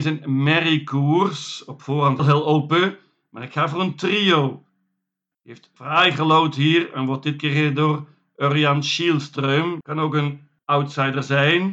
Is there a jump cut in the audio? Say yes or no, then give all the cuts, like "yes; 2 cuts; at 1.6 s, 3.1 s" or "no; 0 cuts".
yes; 3 cuts; at 2.2 s, 5.3 s, 9.8 s